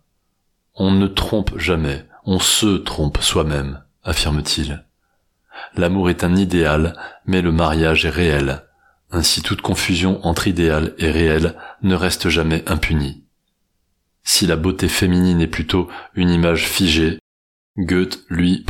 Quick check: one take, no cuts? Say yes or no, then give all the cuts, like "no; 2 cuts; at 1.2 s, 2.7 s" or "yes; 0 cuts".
yes; 0 cuts